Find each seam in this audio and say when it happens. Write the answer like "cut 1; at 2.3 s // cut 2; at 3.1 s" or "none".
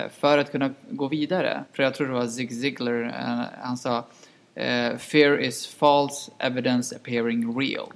none